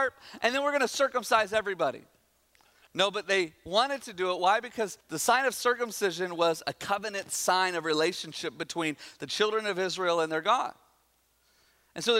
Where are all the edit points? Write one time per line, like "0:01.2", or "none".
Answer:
0:02.9
0:05.0